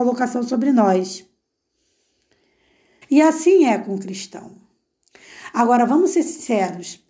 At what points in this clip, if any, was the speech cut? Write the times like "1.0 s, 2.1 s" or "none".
3.0 s

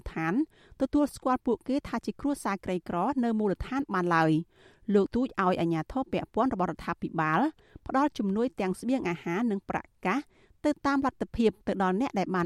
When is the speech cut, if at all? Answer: 5.1 s

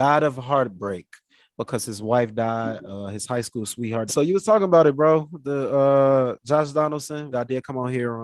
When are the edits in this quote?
4.1 s, 7.3 s

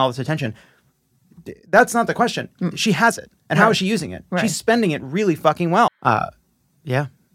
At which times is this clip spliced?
5.9 s

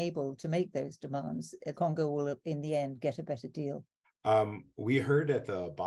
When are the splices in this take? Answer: 1.7 s, 4.0 s

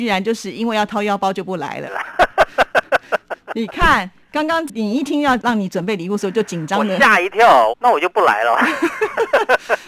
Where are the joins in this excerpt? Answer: 1.8 s, 7.7 s

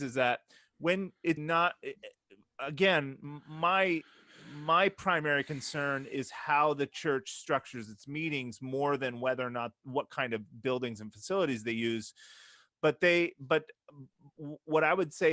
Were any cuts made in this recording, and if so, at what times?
1.4 s

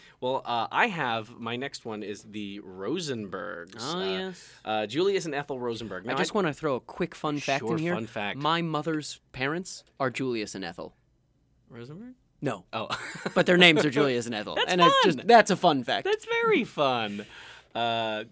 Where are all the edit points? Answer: none

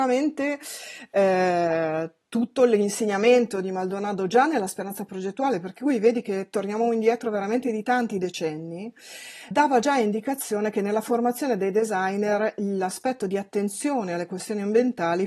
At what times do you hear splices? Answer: 9.5 s

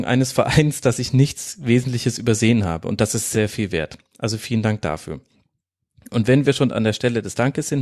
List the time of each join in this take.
3.3 s

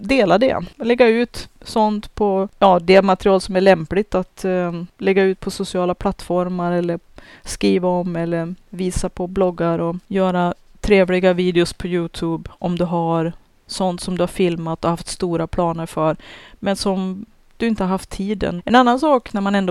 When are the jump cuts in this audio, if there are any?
18.6 s

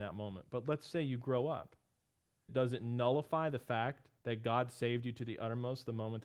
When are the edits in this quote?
2.5 s, 4.2 s

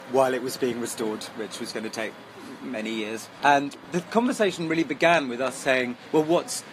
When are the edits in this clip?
none

